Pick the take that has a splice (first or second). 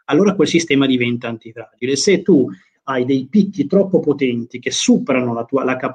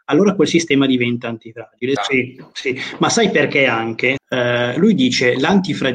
second